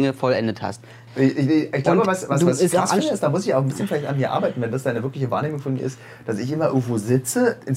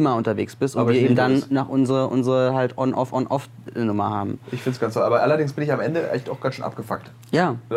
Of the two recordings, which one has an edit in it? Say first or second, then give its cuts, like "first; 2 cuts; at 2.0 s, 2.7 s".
first; 1 cut; at 1.1 s